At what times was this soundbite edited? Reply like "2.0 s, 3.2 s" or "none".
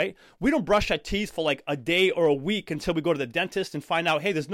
none

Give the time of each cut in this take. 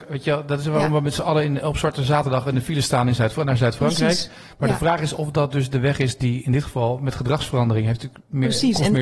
none

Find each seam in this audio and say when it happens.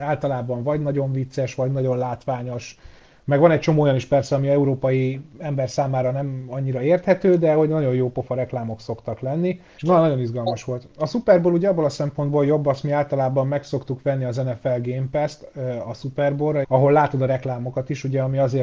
9.8 s, 16.6 s

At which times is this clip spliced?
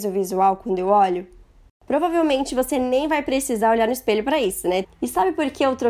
4.8 s

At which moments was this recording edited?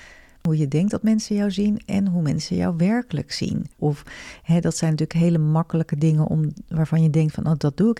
3.8 s

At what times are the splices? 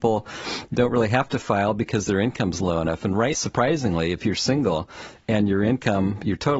3.3 s

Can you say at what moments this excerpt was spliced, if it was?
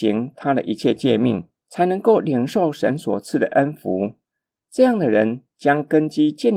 4.5 s

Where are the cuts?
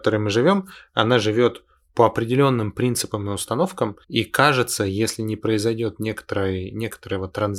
4.0 s

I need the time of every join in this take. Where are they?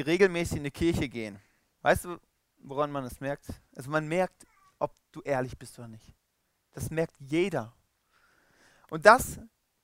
1.8 s

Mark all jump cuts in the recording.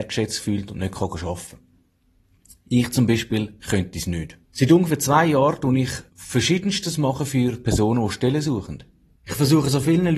4.4 s, 6.1 s, 9.2 s

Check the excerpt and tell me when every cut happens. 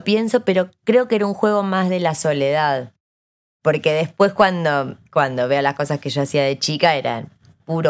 none

